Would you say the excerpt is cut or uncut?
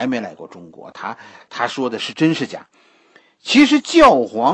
uncut